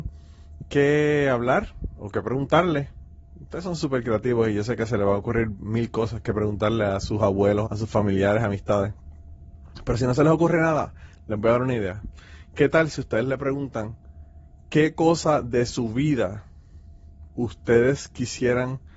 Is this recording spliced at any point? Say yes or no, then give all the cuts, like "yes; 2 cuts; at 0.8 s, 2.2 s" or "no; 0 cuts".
yes; 1 cut; at 7.6 s